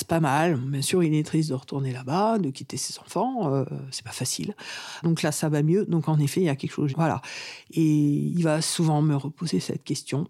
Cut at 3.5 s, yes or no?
no